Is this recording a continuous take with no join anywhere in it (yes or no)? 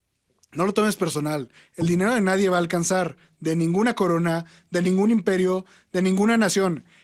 yes